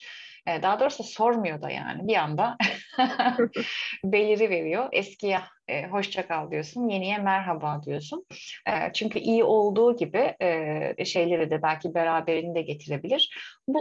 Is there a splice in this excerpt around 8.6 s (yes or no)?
yes